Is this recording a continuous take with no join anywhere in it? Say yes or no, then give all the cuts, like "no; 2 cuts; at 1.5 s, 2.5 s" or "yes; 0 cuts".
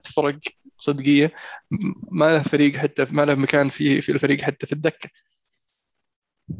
yes; 0 cuts